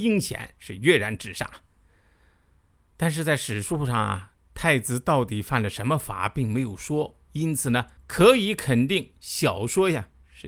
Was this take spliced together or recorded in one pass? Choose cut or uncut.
cut